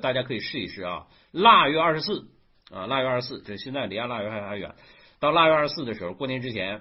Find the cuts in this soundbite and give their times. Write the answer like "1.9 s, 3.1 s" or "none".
3.4 s

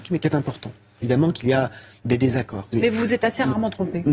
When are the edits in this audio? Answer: 1.0 s, 2.7 s

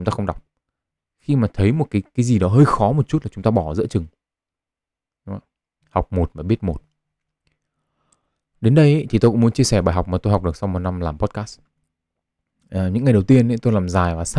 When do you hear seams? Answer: 1.0 s

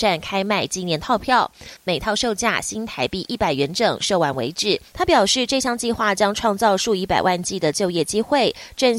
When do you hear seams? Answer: 1.8 s, 4.9 s

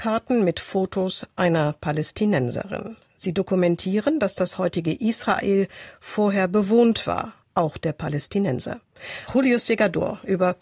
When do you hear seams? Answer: 7.4 s, 9.3 s

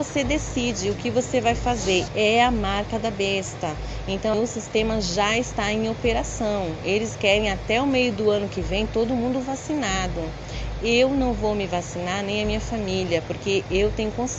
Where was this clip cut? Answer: 2.1 s, 4.3 s

